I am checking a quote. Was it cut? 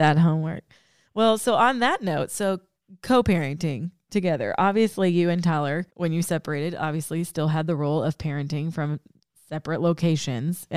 yes; 1 cut; at 5.9 s

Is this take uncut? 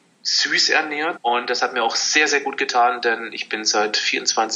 no; 1 cut; at 1.2 s

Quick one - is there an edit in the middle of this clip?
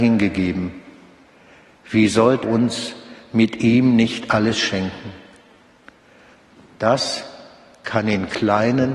yes; 1 cut; at 2.4 s

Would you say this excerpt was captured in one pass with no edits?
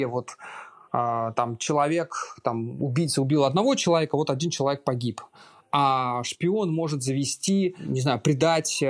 yes; 0 cuts

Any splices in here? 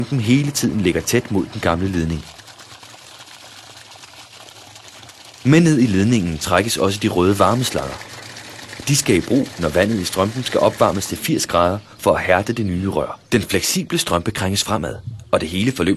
yes; 1 cut; at 13.3 s

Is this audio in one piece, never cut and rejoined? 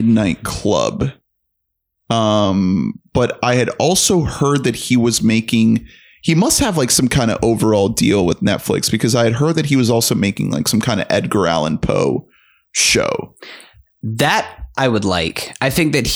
yes; 0 cuts

